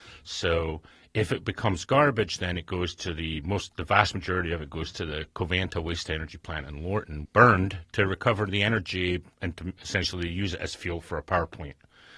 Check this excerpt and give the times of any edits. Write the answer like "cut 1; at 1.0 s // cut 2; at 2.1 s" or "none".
cut 1; at 7.3 s // cut 2; at 9.8 s